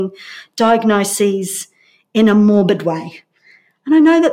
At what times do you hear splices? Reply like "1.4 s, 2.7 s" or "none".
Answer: none